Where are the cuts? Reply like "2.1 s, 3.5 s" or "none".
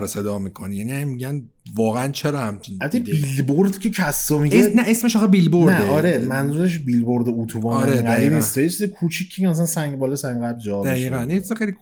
none